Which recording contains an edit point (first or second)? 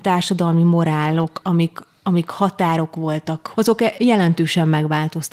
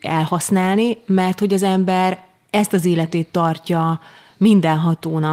first